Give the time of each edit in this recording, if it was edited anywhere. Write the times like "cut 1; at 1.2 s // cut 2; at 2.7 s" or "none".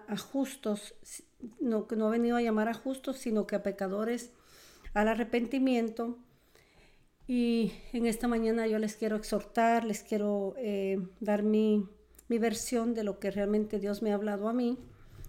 none